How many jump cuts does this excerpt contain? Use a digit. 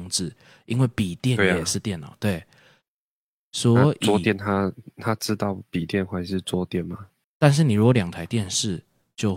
1